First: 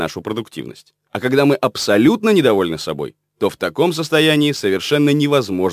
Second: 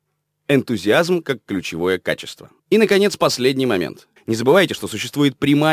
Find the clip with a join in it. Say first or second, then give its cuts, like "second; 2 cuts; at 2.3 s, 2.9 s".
second; 2 cuts; at 2.6 s, 4.2 s